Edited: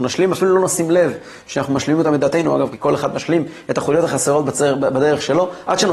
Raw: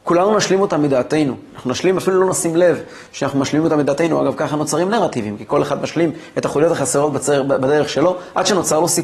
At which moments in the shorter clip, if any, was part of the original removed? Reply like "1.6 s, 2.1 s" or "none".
2.7 s